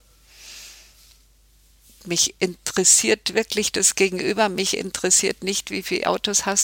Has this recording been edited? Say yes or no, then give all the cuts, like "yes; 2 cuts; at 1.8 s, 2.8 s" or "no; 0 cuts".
no; 0 cuts